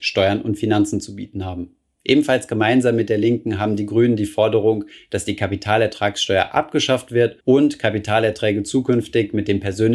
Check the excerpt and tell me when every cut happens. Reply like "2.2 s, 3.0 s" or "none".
1.9 s, 7.4 s

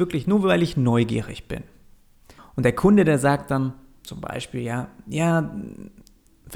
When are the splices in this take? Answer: 2.4 s

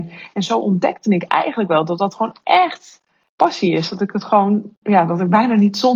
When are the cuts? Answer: none

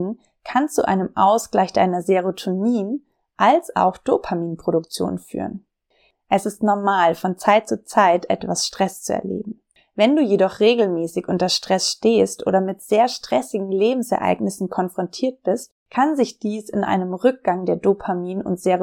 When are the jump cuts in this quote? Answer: none

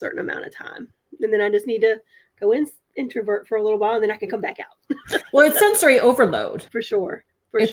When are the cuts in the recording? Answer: 6.7 s

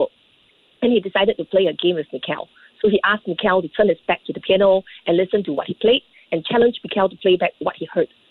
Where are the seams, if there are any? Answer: none

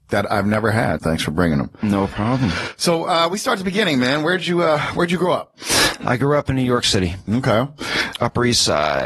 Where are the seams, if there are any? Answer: 1.0 s

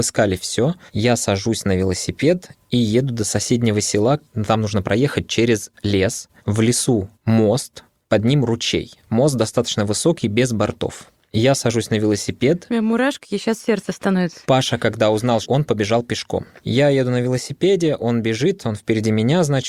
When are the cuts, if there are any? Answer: 7.1 s, 15.4 s

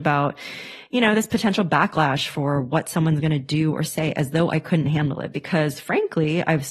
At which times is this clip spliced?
none

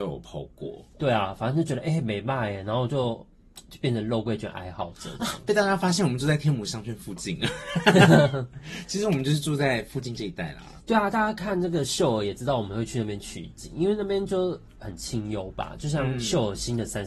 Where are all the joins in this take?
none

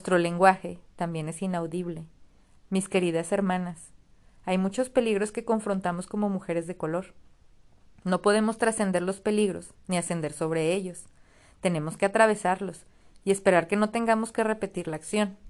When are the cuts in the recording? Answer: 2.6 s

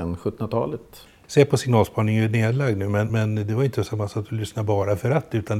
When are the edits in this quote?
1.2 s, 3.1 s

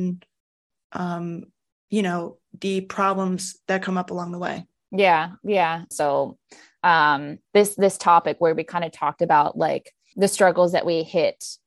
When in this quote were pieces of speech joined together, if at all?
5.9 s, 7.5 s, 10.1 s

